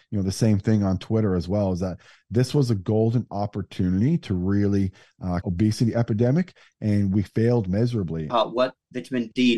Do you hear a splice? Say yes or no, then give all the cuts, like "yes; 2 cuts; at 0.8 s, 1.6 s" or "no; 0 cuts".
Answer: yes; 2 cuts; at 5.4 s, 8.3 s